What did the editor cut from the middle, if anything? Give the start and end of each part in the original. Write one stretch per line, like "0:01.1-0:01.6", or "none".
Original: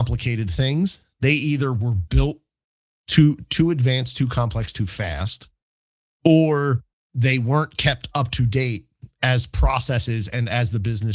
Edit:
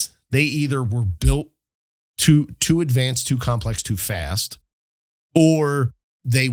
none